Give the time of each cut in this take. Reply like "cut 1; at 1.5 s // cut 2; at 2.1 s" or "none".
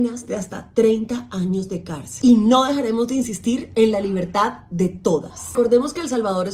cut 1; at 2.2 s // cut 2; at 5.5 s